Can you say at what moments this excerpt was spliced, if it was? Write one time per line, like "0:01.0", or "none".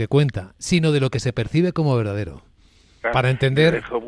0:03.0